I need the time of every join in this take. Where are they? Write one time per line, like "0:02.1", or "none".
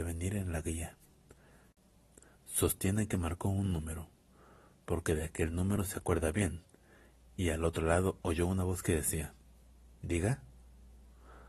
none